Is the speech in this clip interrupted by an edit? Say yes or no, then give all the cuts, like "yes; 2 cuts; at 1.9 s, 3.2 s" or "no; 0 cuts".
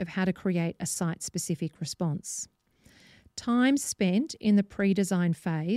no; 0 cuts